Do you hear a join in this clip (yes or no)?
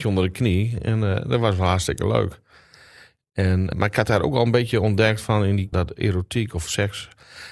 yes